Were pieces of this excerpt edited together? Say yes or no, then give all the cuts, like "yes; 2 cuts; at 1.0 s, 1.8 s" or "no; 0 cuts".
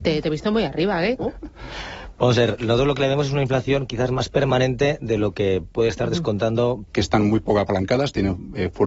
yes; 2 cuts; at 1.2 s, 6.9 s